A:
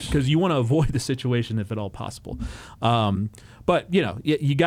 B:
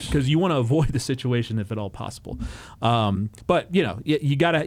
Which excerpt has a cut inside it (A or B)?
B